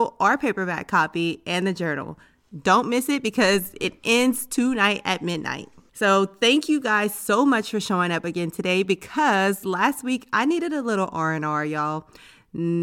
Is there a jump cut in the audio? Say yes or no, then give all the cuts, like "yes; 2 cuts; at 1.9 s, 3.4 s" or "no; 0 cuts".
no; 0 cuts